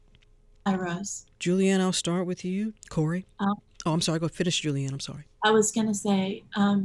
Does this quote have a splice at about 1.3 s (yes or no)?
yes